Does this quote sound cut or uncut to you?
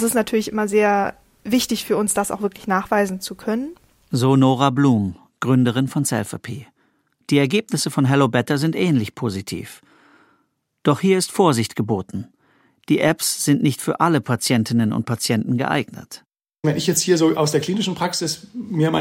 uncut